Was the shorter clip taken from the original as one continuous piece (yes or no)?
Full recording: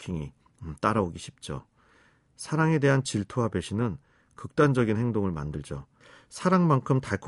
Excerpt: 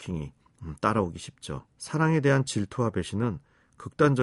no